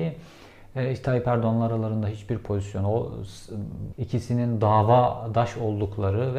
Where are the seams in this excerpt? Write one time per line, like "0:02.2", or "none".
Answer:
0:03.9